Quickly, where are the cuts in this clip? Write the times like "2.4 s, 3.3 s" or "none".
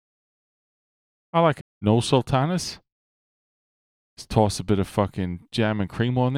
1.6 s